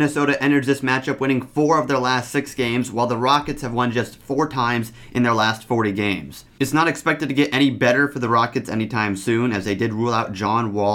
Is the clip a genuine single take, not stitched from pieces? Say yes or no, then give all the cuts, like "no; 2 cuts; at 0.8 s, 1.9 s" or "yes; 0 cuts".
yes; 0 cuts